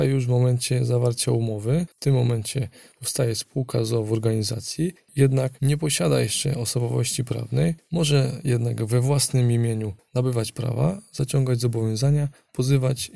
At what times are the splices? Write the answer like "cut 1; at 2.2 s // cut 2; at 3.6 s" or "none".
none